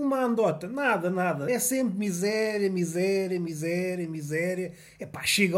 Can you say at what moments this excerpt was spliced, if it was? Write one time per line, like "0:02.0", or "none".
none